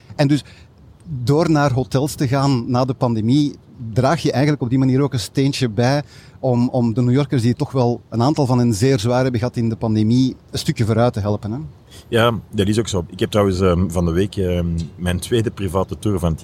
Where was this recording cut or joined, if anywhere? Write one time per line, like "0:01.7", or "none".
none